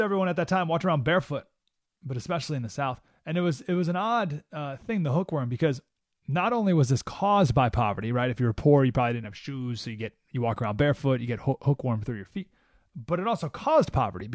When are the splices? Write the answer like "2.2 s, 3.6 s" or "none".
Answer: none